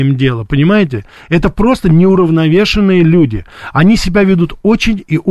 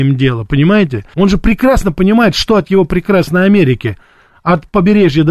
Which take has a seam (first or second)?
second